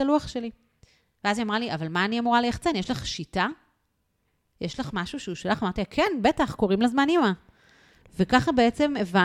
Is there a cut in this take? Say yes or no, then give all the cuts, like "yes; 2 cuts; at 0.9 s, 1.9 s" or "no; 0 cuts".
no; 0 cuts